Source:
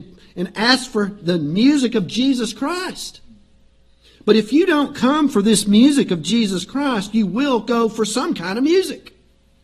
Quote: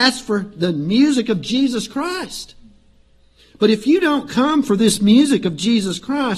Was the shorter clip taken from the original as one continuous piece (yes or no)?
yes